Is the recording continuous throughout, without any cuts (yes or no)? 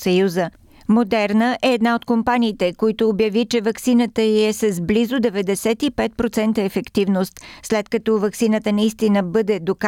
yes